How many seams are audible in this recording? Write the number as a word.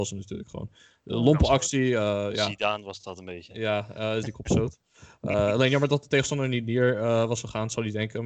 one